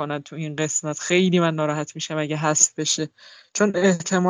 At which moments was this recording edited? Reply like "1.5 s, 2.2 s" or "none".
none